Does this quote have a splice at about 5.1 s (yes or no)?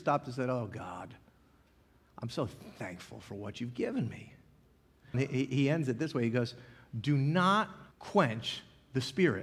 yes